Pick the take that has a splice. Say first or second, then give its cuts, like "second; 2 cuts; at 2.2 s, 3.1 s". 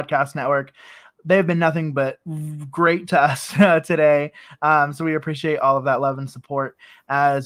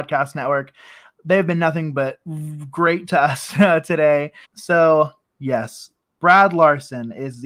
second; 1 cut; at 4.4 s